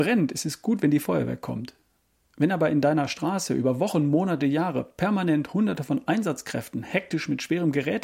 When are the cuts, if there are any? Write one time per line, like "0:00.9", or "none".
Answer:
none